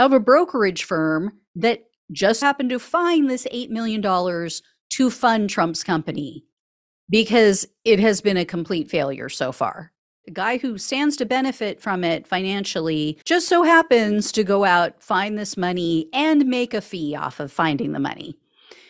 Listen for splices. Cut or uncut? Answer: cut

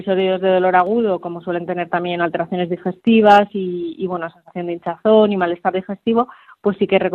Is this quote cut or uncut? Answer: uncut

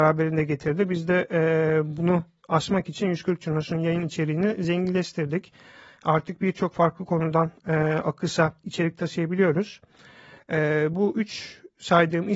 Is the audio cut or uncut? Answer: cut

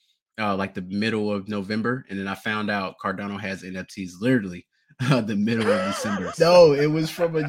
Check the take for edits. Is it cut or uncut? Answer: cut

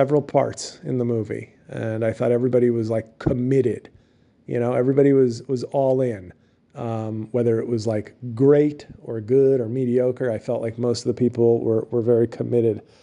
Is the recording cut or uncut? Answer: uncut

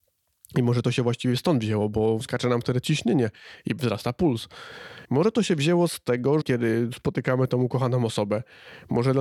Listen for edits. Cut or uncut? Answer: cut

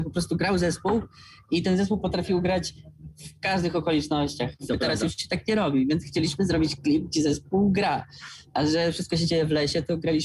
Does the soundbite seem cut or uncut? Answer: cut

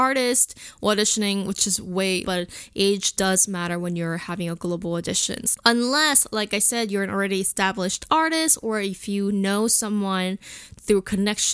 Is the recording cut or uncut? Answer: cut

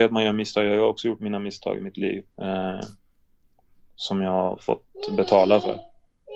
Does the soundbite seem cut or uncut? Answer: cut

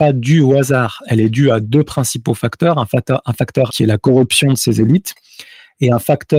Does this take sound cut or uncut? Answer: cut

